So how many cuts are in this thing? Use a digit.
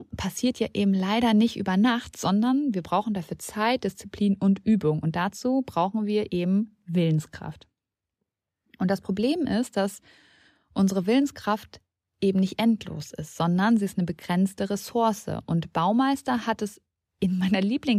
0